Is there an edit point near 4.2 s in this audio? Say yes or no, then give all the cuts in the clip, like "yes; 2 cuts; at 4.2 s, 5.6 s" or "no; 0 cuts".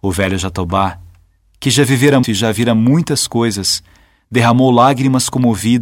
no; 1 cut; at 2.2 s